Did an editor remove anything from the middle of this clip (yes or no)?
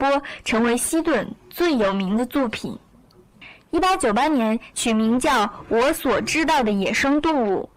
yes